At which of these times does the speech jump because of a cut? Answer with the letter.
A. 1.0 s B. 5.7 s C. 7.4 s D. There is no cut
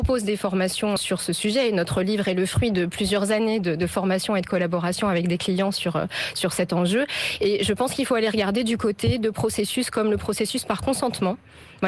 A